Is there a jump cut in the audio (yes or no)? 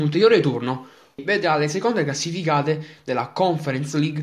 yes